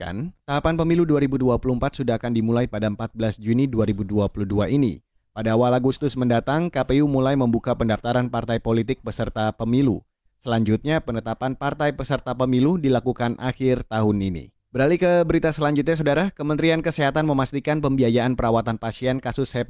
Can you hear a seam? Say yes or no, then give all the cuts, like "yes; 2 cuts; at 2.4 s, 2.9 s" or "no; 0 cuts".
no; 0 cuts